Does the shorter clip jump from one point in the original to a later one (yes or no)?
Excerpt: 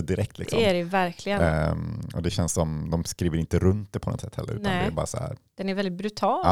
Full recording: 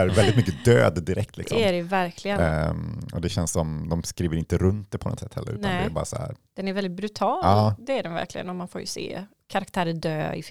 no